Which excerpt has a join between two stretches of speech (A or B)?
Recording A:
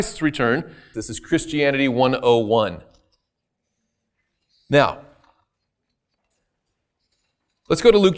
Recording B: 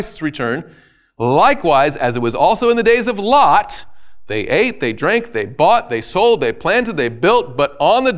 A